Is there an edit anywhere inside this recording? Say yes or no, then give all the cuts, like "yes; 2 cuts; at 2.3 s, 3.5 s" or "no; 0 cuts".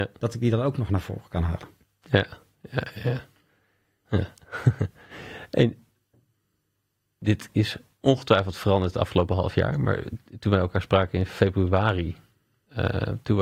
yes; 1 cut; at 4.0 s